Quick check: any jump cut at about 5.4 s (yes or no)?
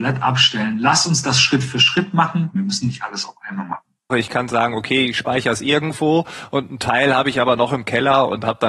no